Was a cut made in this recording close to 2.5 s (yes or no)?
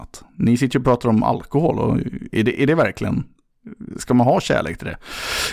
no